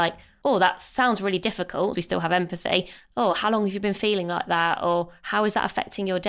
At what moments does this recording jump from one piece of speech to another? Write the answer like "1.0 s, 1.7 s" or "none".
2.0 s